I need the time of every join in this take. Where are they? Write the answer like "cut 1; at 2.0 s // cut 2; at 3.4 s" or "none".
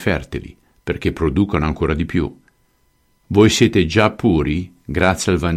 none